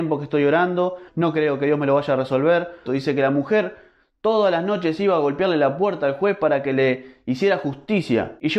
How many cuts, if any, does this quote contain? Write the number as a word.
two